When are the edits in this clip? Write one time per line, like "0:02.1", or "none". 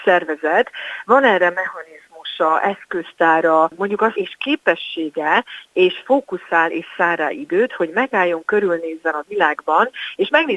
0:04.1